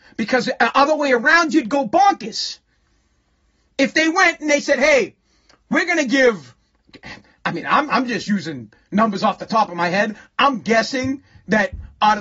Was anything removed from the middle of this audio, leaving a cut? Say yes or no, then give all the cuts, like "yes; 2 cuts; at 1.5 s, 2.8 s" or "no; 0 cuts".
no; 0 cuts